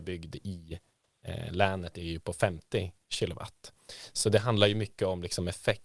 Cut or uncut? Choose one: uncut